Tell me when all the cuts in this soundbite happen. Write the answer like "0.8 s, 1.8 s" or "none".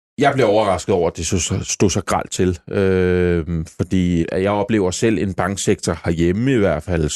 4.2 s